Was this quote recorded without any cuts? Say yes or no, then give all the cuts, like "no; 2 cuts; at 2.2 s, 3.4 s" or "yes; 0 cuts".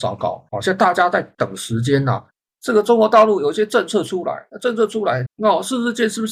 no; 2 cuts; at 2.5 s, 5.3 s